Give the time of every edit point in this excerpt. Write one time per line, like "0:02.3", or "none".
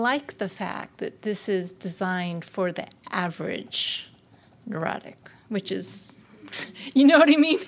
none